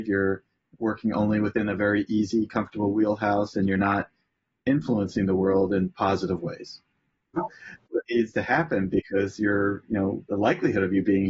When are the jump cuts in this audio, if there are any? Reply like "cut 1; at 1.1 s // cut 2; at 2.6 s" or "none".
cut 1; at 7.4 s // cut 2; at 10.2 s